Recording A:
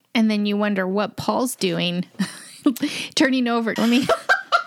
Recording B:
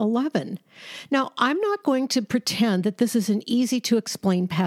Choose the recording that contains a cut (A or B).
A